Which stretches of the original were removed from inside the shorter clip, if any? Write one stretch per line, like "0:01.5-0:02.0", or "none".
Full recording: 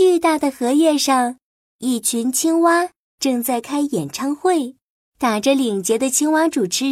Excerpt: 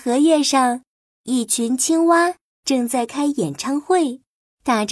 none